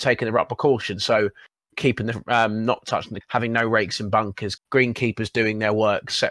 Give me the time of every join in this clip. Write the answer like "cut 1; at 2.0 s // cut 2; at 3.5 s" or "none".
cut 1; at 3.2 s // cut 2; at 4.6 s